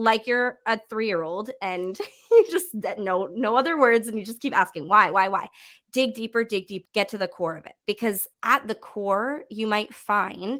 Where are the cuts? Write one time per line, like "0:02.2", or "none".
0:06.9
0:08.3